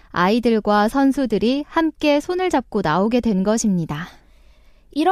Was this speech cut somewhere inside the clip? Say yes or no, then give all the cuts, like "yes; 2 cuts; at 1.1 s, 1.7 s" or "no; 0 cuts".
no; 0 cuts